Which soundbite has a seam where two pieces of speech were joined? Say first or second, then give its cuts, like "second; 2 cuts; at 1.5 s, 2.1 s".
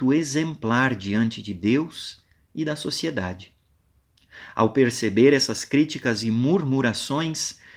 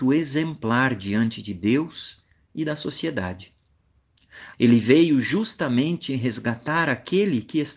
second; 1 cut; at 4.5 s